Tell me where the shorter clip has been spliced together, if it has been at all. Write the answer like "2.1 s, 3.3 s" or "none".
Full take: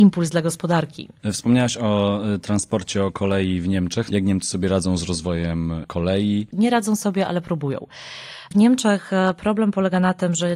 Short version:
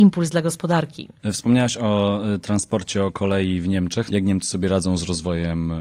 none